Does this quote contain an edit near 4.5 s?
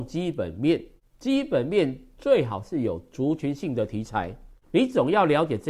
yes; 1 cut; at 4.5 s

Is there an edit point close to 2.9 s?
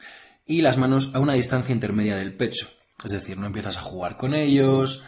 yes; 1 cut; at 2.9 s

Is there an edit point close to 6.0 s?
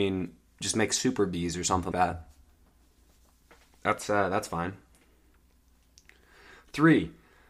no; 1 cut; at 1.9 s

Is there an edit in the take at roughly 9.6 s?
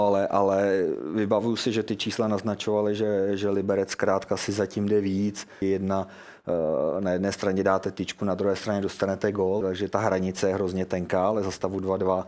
yes; 2 cuts; at 5.6 s, 9.6 s

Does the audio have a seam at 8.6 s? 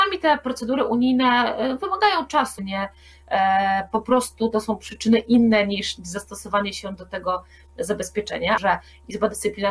yes; 2 cuts; at 2.6 s, 8.6 s

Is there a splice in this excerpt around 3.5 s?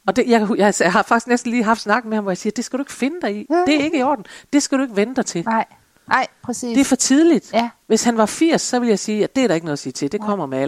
no; 0 cuts

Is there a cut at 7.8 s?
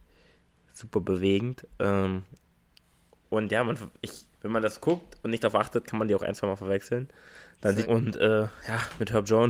yes; 2 cuts; at 4.3 s, 7.8 s

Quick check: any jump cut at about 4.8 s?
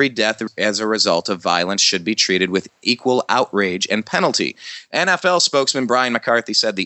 no; 0 cuts

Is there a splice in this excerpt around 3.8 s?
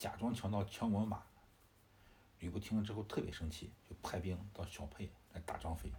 yes; 1 cut; at 3.8 s

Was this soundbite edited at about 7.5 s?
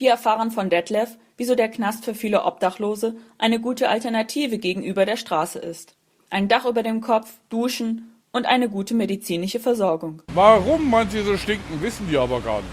yes; 2 cuts; at 7.5 s, 10.3 s

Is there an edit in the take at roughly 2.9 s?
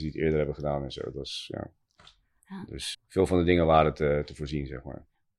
yes; 1 cut; at 2.9 s

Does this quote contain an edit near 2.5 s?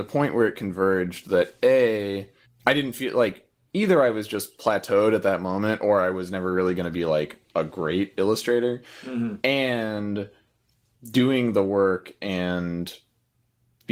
yes; 1 cut; at 2.5 s

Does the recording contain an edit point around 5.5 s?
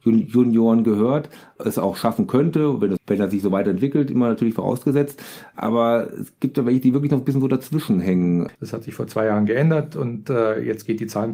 no; 2 cuts; at 3.0 s, 8.6 s

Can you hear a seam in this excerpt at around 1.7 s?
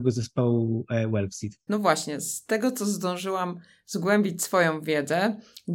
yes; 1 cut; at 1.7 s

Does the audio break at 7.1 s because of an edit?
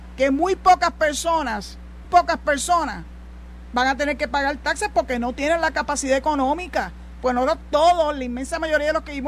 no; 1 cut; at 2.0 s

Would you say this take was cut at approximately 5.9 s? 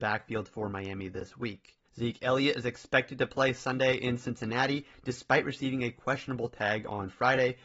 no; 1 cut; at 1.8 s

